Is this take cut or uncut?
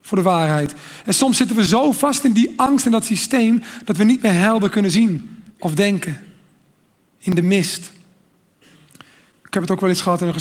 cut